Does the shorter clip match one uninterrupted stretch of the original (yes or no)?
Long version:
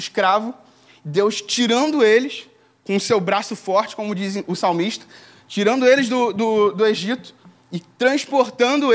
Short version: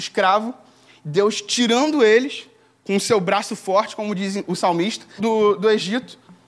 no